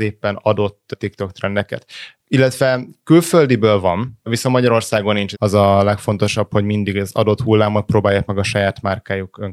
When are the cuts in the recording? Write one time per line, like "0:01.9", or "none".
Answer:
0:05.3